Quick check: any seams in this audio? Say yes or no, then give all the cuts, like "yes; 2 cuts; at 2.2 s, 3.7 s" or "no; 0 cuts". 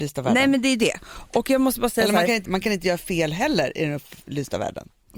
yes; 1 cut; at 2.5 s